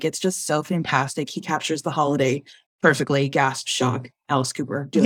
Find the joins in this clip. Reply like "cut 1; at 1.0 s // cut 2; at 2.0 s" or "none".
none